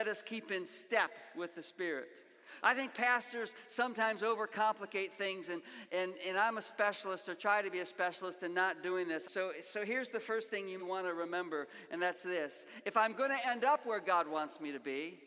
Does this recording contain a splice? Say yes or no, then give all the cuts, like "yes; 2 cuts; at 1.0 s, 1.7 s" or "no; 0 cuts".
yes; 3 cuts; at 2.6 s, 9.2 s, 10.8 s